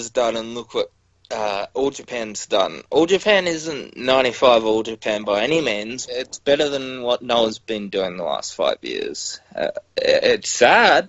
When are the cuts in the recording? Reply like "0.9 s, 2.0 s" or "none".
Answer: 6.1 s